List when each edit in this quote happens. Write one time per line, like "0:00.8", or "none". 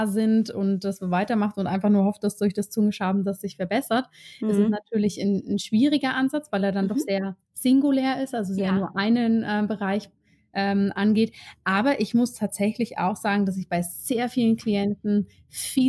0:07.4